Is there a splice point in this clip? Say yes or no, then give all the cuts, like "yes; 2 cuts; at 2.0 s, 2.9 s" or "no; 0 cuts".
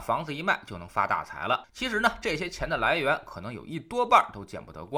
yes; 1 cut; at 1.6 s